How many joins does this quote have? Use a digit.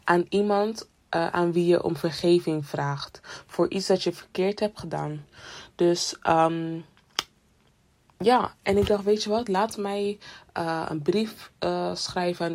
0